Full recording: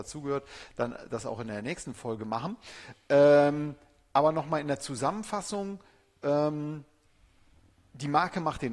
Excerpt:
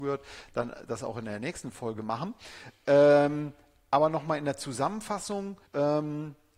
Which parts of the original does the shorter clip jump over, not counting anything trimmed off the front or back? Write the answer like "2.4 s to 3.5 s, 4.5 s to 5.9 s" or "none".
5.9 s to 6.2 s